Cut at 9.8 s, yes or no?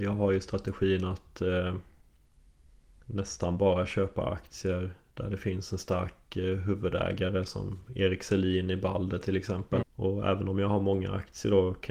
yes